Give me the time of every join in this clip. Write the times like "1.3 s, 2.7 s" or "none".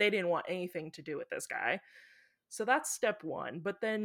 none